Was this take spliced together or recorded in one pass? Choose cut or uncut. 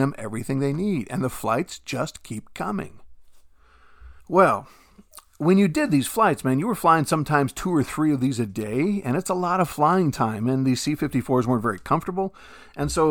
cut